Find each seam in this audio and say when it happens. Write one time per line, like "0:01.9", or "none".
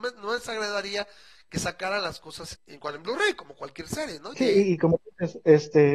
0:02.5
0:04.3